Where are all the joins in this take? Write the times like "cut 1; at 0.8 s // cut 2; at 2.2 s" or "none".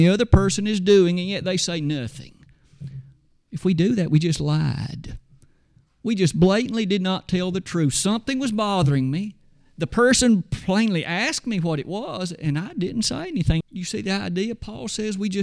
cut 1; at 13.6 s